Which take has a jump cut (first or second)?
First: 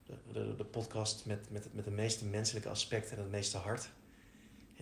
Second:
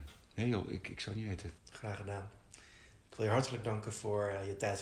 second